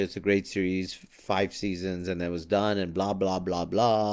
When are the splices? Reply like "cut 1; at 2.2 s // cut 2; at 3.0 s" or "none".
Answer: none